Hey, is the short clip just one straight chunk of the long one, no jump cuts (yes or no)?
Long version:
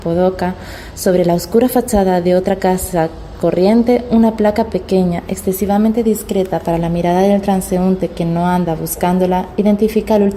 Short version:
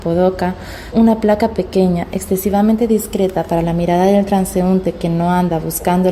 no